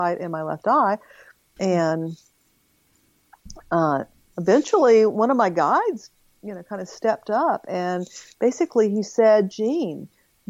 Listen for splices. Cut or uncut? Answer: cut